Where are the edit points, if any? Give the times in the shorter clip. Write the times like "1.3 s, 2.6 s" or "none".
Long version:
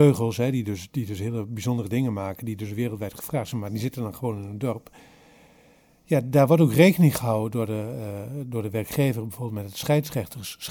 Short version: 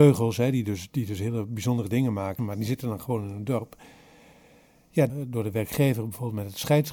2.4 s, 5.1 s